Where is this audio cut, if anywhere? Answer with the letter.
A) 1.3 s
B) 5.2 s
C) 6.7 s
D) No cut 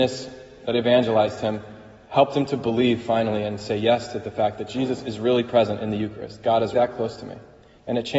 C